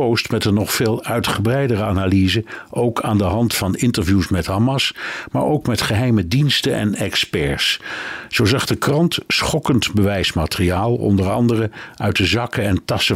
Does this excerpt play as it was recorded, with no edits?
yes; 0 cuts

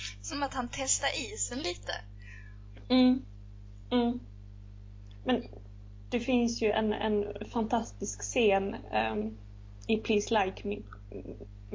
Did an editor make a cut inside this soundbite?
no; 0 cuts

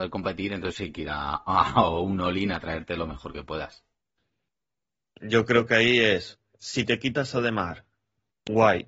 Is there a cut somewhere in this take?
no; 0 cuts

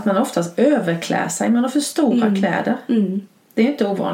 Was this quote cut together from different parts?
no; 0 cuts

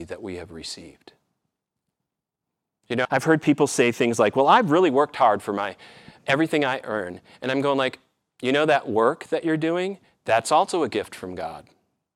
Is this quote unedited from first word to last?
no; 1 cut; at 3.0 s

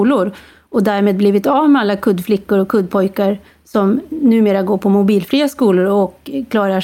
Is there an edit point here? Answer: no; 0 cuts

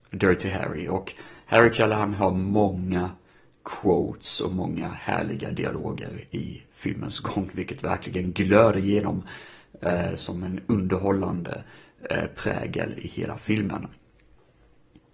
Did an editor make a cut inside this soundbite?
no; 0 cuts

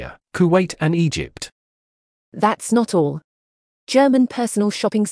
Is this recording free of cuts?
yes; 0 cuts

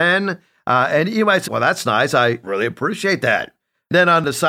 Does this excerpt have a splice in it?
yes; 1 cut; at 1.5 s

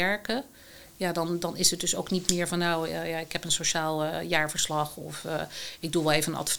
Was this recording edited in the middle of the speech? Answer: no; 0 cuts

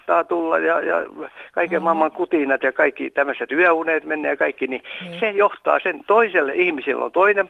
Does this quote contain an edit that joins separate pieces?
no; 0 cuts

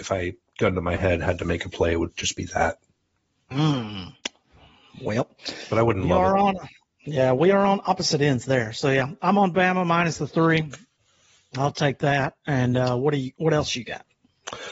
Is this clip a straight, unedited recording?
yes; 0 cuts

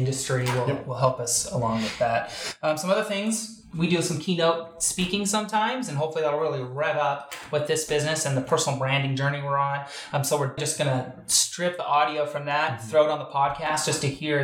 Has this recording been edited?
yes; 1 cut; at 10.6 s

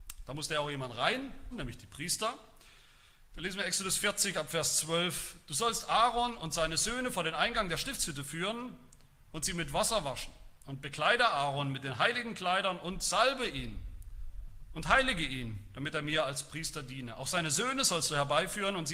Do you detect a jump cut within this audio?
yes; 1 cut; at 1.5 s

